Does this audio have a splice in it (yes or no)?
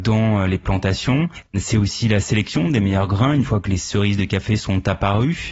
no